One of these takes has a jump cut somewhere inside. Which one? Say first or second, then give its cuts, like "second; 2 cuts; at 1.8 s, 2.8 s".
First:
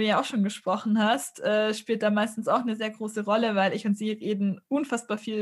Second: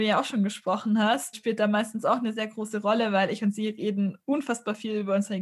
second; 1 cut; at 1.3 s